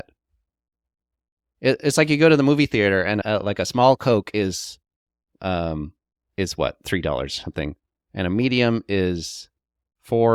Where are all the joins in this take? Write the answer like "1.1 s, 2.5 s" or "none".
3.2 s